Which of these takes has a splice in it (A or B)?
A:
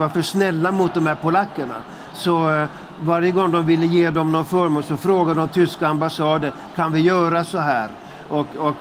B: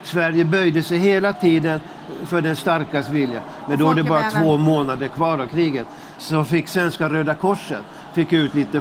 B